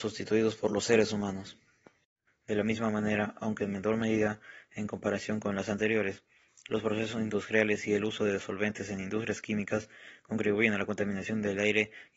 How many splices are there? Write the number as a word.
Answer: one